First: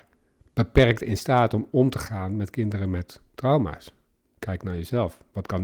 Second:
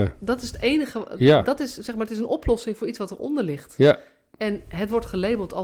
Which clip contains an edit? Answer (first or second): first